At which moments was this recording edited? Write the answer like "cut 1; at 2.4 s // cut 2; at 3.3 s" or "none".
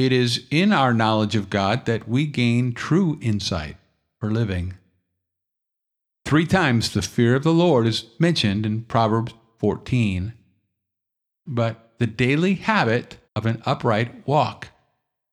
cut 1; at 11.5 s // cut 2; at 13.2 s